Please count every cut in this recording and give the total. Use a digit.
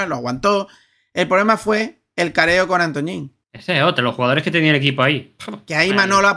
1